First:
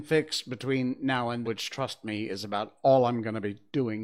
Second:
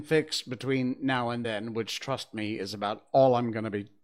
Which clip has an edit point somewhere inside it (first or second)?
first